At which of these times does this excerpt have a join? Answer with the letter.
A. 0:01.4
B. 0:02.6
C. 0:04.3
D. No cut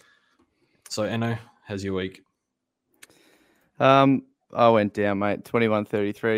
D